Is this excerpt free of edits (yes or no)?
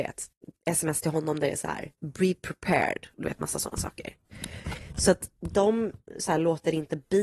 no